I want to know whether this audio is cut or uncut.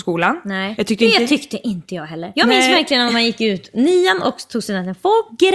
uncut